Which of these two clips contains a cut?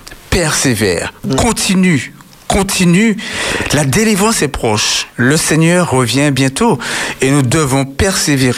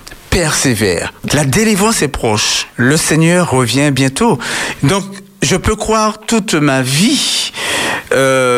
second; 2 cuts; at 1.3 s, 4.8 s

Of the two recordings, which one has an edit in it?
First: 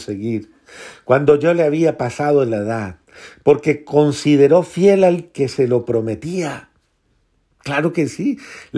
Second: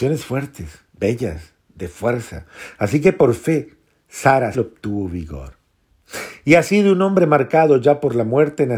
second; 1 cut; at 4.5 s

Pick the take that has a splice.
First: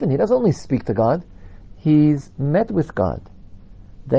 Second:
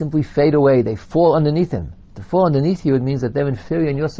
second; 1 cut; at 2.0 s

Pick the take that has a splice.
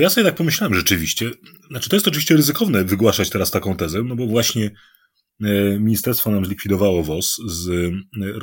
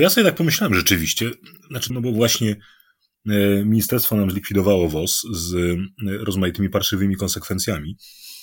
second; 1 cut; at 1.9 s

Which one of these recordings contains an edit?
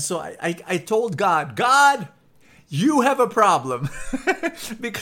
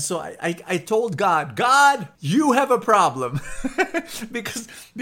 second; 1 cut; at 2.1 s

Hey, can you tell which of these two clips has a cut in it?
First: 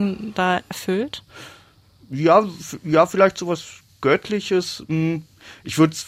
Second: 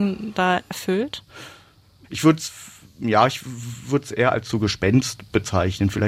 second; 1 cut; at 2.0 s

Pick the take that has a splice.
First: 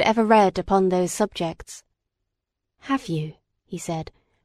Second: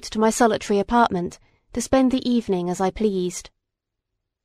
first; 1 cut; at 2.8 s

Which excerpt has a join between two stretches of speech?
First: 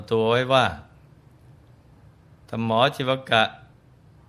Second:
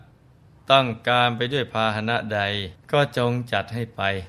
second; 1 cut; at 2.8 s

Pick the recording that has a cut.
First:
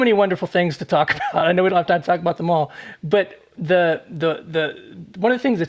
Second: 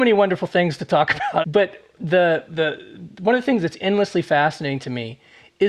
second; 2 cuts; at 1.4 s, 2.5 s

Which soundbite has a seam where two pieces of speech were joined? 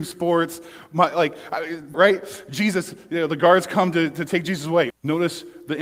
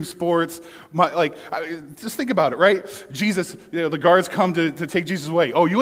first; 2 cuts; at 1.9 s, 4.9 s

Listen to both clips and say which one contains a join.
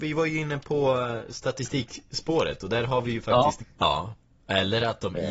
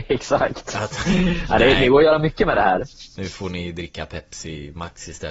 first; 1 cut; at 3.6 s

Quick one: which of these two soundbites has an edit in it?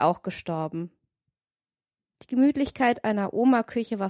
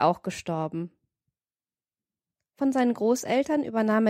first; 1 cut; at 2.1 s

